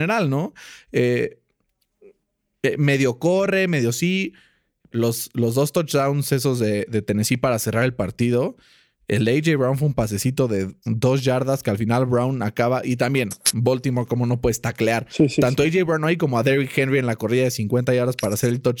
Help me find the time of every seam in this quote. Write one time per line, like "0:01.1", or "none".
0:04.9